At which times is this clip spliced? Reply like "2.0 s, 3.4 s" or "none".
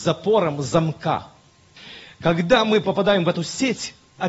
none